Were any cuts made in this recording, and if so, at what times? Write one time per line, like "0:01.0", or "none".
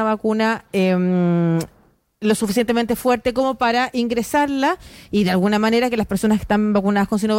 none